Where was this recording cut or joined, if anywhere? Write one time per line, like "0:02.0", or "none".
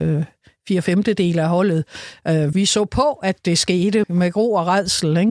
0:02.5
0:04.0